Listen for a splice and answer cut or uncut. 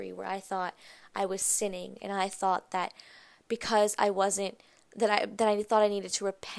uncut